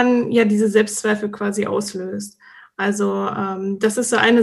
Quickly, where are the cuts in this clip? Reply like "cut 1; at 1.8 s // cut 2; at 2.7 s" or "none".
none